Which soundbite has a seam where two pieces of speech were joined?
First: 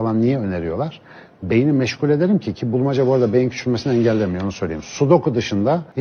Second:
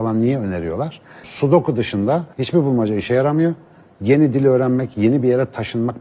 second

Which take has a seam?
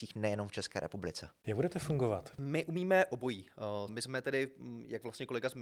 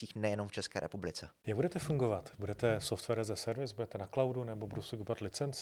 first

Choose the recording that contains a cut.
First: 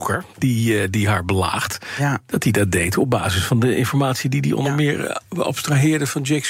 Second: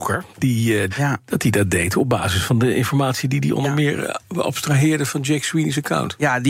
second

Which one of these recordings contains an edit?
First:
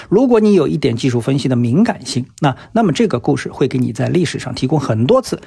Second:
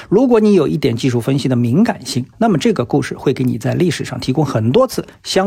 second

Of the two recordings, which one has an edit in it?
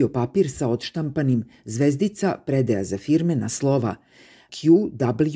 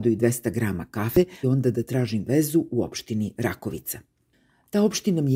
second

